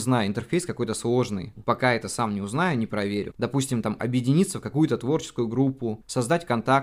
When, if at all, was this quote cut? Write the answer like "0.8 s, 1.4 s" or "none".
1.6 s, 3.3 s